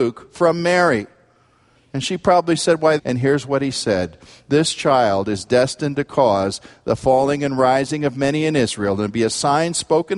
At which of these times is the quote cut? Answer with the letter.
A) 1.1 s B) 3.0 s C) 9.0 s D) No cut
B